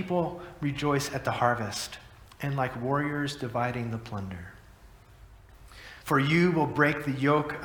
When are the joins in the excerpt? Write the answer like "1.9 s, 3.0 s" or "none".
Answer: 6.0 s